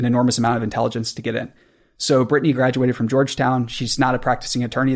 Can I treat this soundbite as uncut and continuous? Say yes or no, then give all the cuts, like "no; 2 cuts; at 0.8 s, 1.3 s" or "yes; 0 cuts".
yes; 0 cuts